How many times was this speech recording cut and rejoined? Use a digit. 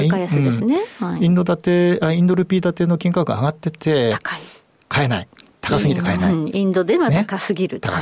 0